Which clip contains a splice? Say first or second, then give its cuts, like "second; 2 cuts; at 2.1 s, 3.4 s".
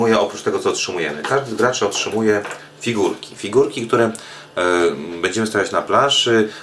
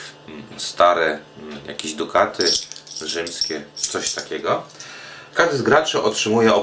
second; 1 cut; at 5.3 s